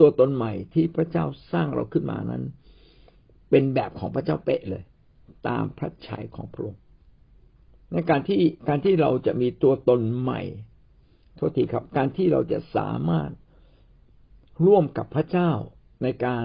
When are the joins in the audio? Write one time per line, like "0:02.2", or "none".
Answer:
0:08.6